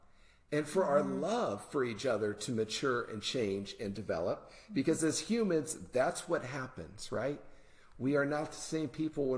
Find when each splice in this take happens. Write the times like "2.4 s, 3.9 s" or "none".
none